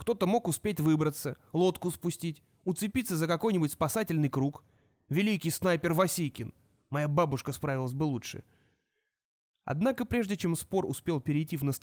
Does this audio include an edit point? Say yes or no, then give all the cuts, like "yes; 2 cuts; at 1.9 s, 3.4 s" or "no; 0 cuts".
no; 0 cuts